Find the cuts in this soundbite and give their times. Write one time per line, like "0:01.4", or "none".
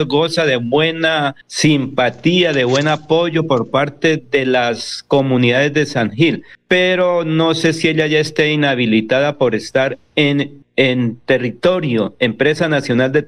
0:01.4